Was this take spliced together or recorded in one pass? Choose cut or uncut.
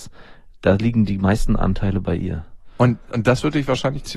uncut